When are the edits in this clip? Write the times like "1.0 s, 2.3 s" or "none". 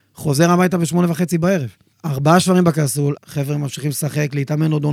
1.9 s, 3.2 s